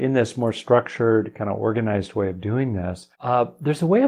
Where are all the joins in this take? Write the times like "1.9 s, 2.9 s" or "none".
3.1 s